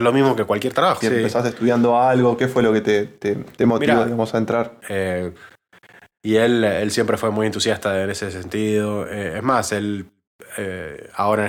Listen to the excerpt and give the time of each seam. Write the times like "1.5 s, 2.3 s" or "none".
1.0 s, 4.8 s